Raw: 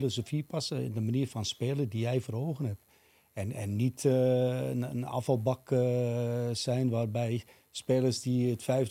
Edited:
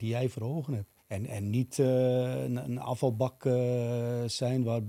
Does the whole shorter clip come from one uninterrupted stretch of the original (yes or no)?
no